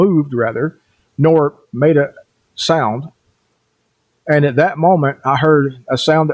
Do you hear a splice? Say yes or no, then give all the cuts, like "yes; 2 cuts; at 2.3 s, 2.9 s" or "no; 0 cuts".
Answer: no; 0 cuts